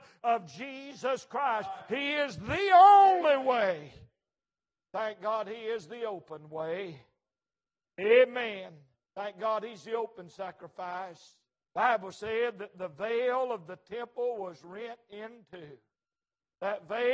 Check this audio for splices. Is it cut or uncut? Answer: cut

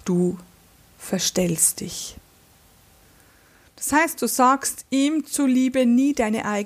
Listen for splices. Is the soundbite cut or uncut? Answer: uncut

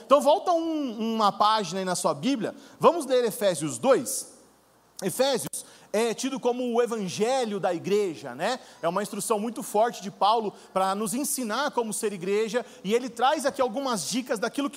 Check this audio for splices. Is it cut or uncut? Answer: uncut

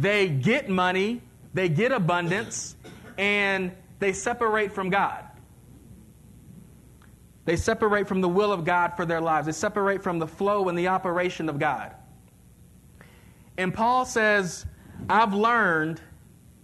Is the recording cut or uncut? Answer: uncut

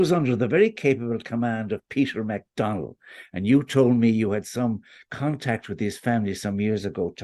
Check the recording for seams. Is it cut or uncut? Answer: uncut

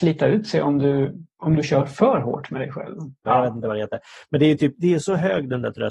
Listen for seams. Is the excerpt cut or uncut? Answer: cut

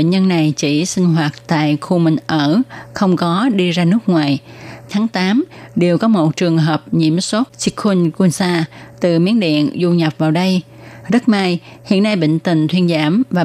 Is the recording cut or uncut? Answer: cut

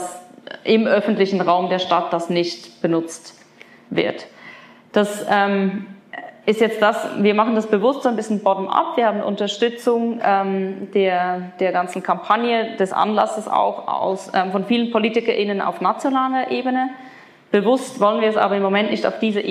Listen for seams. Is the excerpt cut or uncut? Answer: uncut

